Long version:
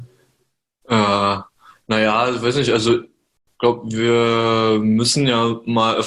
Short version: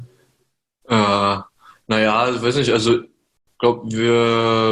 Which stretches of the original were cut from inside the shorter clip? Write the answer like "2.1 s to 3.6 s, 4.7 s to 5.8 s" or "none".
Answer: none